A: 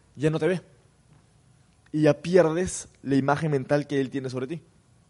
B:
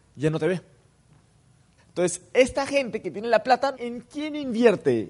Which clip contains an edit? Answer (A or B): B